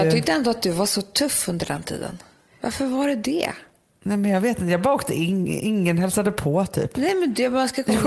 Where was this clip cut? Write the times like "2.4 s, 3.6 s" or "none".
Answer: none